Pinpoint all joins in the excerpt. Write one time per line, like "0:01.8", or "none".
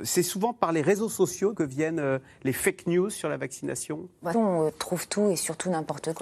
0:01.5
0:04.3